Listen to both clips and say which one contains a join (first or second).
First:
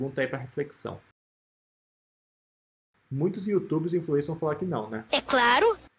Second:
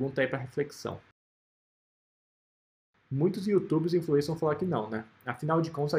first